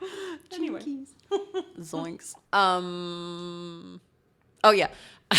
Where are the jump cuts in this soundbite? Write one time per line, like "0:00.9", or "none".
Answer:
0:02.4